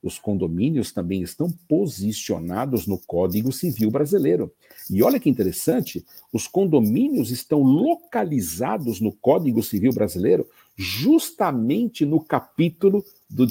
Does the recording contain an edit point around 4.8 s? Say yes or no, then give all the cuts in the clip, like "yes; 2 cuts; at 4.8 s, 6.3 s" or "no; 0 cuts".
no; 0 cuts